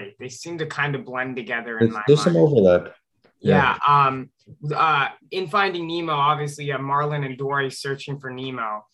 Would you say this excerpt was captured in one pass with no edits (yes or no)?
yes